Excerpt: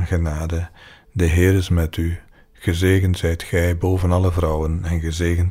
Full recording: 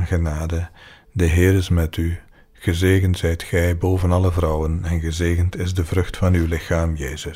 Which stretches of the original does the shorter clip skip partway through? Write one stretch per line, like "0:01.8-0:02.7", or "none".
none